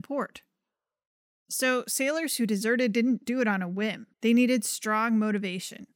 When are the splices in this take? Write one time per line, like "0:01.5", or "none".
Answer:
0:04.1